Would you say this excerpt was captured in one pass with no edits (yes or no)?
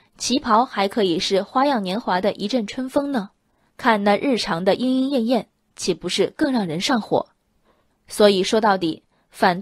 yes